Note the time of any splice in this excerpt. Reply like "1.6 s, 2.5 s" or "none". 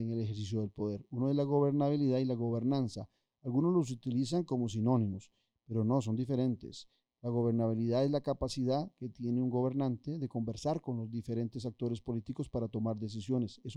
none